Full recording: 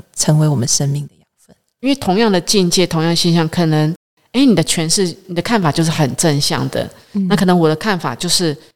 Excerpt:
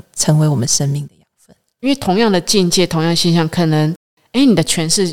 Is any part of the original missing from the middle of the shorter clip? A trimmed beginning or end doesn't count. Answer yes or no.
no